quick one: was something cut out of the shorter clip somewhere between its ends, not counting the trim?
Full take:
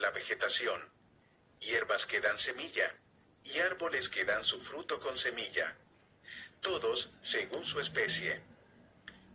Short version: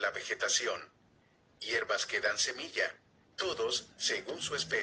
yes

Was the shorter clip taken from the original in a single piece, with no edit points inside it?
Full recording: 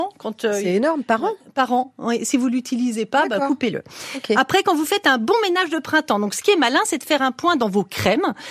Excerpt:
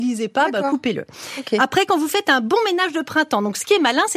yes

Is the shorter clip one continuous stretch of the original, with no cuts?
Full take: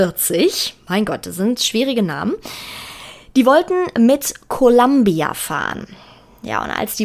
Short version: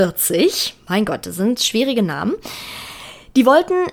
yes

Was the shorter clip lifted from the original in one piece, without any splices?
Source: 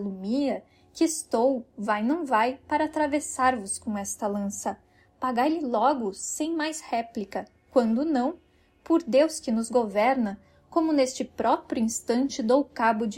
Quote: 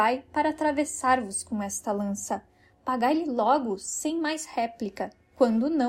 yes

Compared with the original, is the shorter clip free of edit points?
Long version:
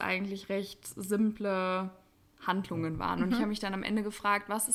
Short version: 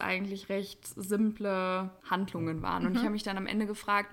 no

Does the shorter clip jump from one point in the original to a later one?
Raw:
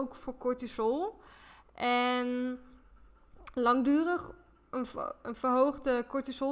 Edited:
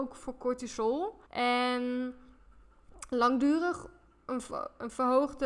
yes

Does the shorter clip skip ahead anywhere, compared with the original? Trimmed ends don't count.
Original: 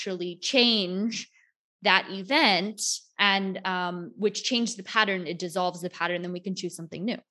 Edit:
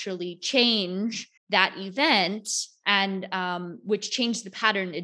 yes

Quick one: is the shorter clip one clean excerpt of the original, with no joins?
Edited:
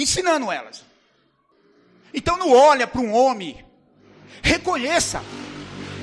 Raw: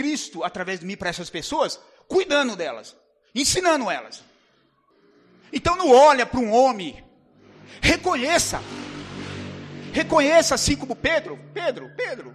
yes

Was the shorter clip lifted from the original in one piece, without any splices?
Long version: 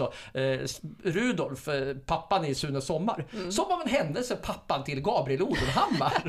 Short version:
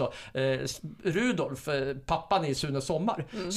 yes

